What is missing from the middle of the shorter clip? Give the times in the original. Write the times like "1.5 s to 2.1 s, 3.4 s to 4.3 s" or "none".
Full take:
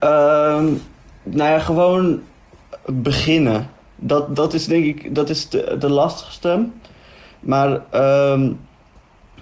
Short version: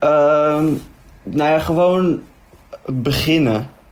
none